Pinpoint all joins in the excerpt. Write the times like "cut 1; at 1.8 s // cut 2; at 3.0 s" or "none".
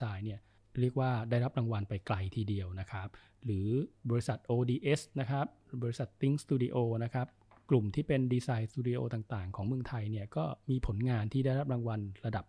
none